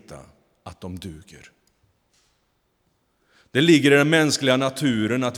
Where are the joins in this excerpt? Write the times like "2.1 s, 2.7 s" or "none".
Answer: none